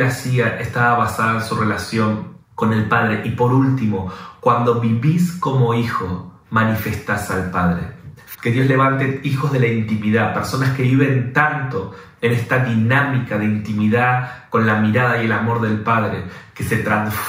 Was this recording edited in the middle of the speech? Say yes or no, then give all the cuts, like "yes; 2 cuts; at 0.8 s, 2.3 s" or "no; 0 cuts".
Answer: yes; 2 cuts; at 2.4 s, 8.3 s